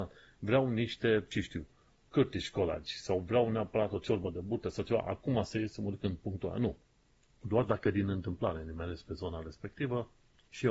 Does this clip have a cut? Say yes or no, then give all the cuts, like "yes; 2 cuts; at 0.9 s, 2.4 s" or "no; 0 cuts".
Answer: no; 0 cuts